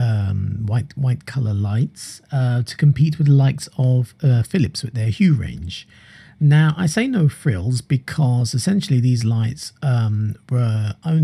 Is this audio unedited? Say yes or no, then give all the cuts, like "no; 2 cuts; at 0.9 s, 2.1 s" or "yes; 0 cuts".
yes; 0 cuts